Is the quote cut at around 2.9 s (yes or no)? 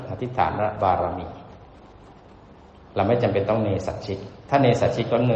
no